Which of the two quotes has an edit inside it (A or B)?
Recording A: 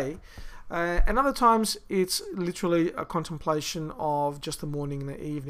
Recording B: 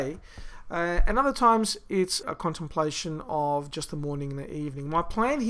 B